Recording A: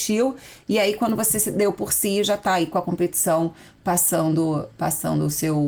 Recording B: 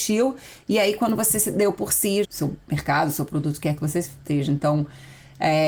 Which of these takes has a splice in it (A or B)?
B